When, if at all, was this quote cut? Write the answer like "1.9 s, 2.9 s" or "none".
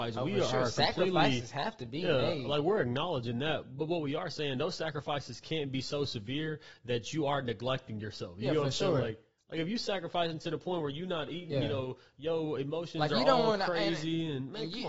11.5 s